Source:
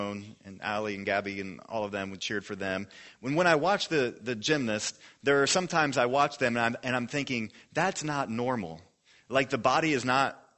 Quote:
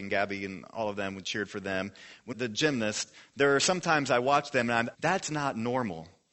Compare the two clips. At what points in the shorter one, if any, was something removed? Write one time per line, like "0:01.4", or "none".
0:02.3
0:04.9